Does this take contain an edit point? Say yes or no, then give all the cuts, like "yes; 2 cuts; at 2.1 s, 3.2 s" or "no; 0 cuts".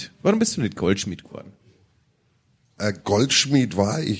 no; 0 cuts